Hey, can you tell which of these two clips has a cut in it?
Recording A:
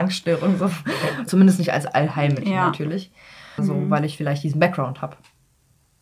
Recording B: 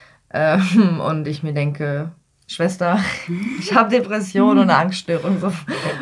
A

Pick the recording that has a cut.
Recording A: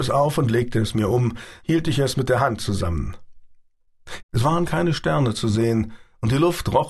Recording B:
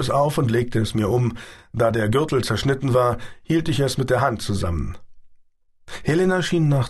A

